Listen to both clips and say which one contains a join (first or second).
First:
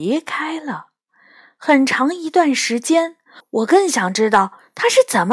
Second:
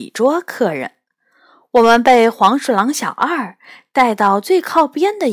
first